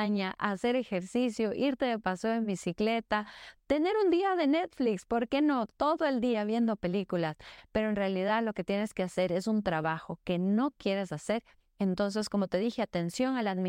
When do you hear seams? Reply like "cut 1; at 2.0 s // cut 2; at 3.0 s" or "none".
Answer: none